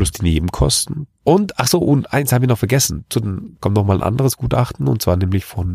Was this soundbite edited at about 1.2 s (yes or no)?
yes